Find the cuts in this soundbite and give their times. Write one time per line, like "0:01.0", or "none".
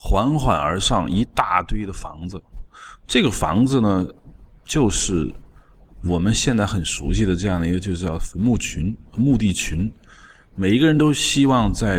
none